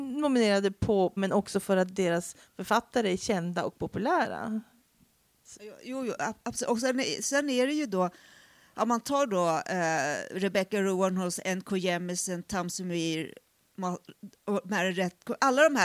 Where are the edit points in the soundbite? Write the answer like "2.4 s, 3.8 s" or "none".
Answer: 1.2 s

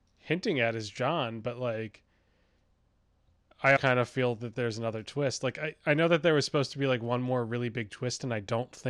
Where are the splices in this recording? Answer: 3.8 s

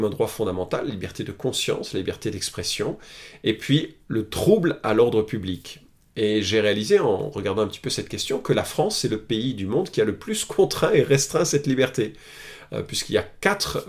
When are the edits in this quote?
none

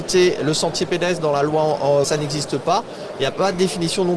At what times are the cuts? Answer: 2.0 s

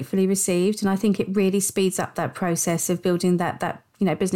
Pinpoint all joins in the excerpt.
none

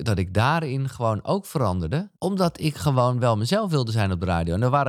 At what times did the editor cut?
2.1 s

